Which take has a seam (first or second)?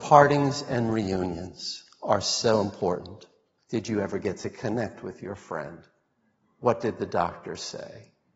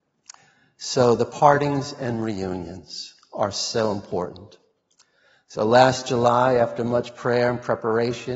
first